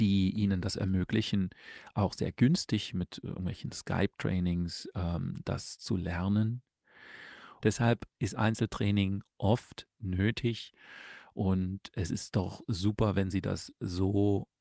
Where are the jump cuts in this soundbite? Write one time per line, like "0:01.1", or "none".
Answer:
0:07.6